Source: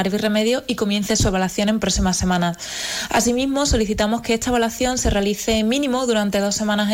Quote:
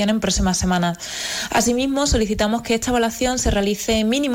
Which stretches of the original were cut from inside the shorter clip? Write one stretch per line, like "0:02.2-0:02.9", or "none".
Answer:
none